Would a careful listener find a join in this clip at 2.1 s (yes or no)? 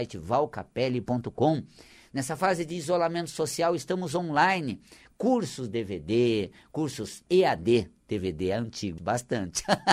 no